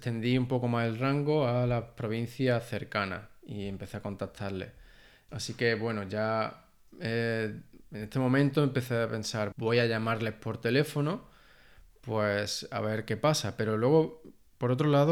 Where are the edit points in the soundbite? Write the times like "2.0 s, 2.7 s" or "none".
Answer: 5.3 s, 9.5 s